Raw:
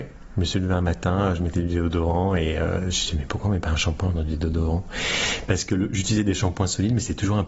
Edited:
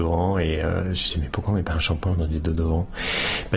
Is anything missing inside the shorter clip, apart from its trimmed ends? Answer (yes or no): no